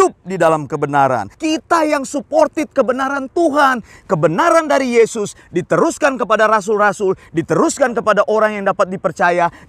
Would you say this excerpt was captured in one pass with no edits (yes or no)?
no